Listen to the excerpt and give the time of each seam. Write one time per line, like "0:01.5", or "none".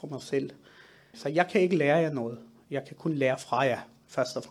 0:01.1